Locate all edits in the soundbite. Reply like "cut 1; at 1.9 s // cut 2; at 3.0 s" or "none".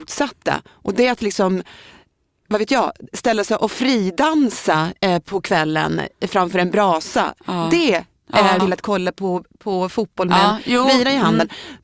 cut 1; at 8.6 s